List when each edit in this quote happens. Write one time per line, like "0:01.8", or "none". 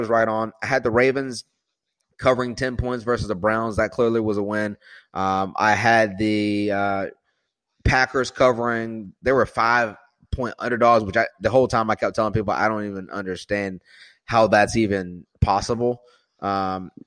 none